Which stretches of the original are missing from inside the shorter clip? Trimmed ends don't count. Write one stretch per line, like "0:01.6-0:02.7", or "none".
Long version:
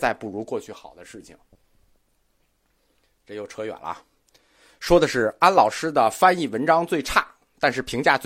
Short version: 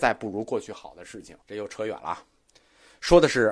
0:01.4-0:03.2